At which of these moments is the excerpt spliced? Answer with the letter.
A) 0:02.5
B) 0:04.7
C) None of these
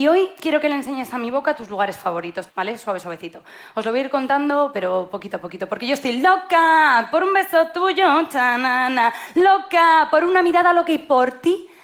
A